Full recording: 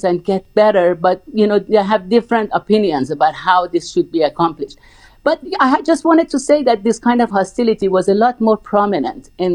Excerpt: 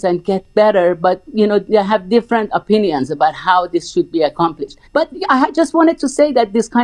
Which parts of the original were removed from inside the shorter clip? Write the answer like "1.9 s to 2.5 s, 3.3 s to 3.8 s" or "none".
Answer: 4.9 s to 5.2 s